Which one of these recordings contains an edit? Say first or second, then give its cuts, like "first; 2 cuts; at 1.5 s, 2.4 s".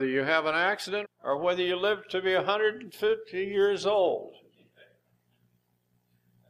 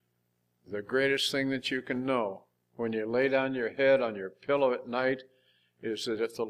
first; 1 cut; at 1.0 s